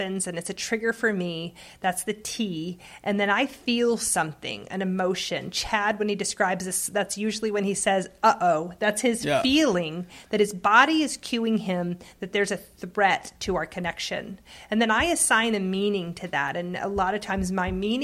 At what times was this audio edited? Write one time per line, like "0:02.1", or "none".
none

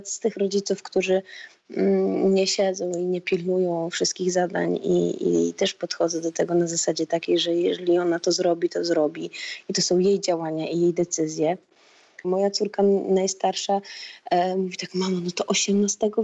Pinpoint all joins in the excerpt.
0:12.2

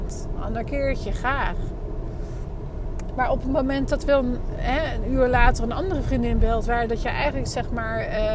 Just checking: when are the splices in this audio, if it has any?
none

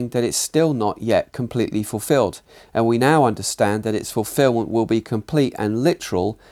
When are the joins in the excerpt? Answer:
none

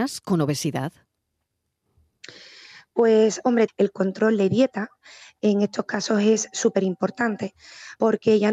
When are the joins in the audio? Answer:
0:03.7

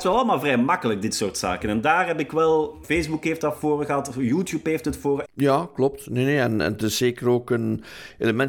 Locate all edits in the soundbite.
0:02.8
0:05.2

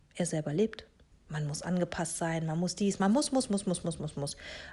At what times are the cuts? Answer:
0:01.1
0:03.0

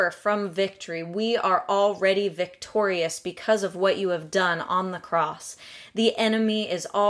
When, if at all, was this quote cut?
none

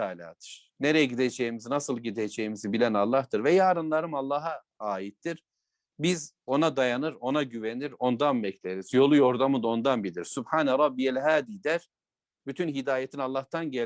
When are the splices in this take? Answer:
none

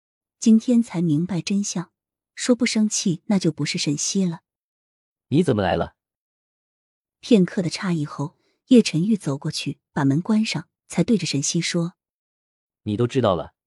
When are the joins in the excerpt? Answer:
none

